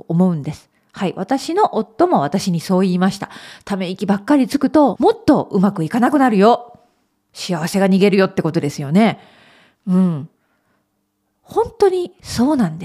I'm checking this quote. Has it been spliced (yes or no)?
yes